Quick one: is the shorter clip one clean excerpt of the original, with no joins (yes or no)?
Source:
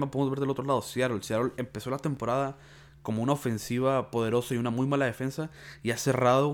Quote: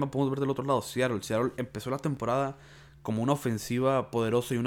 yes